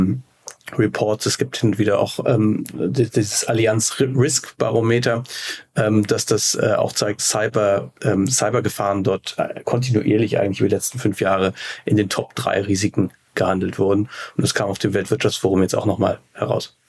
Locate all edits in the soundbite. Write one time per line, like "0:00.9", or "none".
0:07.2